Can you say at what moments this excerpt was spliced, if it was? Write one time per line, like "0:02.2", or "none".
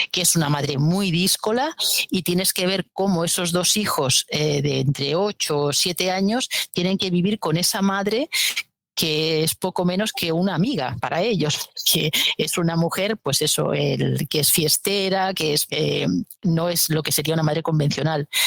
0:15.7